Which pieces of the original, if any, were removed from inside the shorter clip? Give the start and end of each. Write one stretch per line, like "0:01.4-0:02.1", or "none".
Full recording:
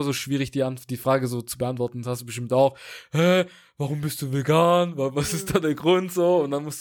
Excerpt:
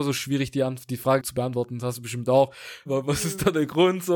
0:01.2-0:01.4
0:03.1-0:04.9